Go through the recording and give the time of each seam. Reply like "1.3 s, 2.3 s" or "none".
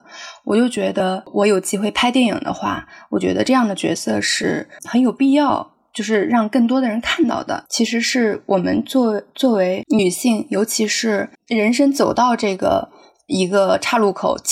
7.7 s